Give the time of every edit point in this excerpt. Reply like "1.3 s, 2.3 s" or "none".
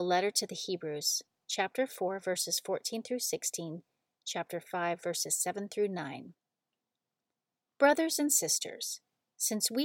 none